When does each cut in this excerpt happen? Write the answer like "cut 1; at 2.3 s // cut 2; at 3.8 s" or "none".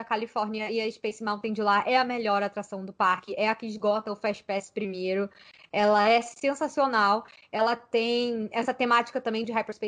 none